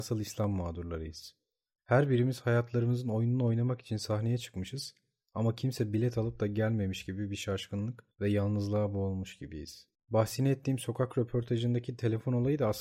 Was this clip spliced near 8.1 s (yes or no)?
yes